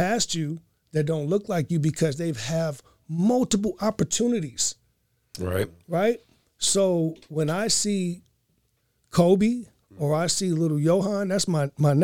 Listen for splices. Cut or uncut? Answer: uncut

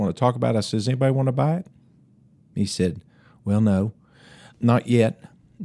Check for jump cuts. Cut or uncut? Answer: cut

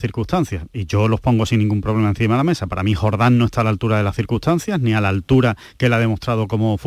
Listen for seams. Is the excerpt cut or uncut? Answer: uncut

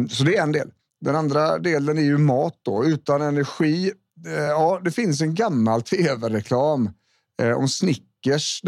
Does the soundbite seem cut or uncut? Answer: uncut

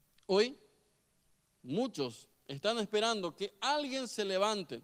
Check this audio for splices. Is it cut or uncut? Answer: cut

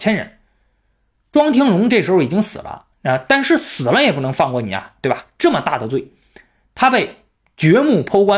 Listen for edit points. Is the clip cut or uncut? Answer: uncut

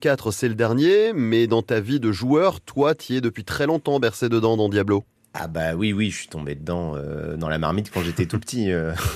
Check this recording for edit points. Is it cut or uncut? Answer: uncut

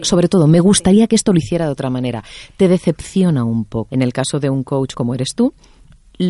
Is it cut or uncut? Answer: cut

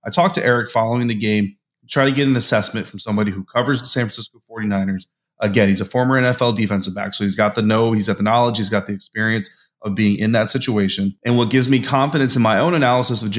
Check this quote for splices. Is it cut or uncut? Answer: uncut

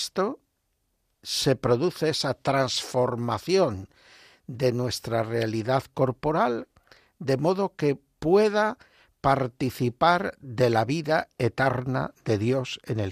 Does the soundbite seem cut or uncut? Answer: uncut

